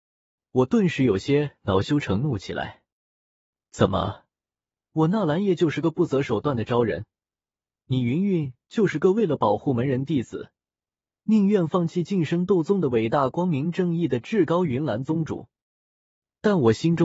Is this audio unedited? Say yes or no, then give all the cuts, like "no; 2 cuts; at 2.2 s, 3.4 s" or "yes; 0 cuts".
yes; 0 cuts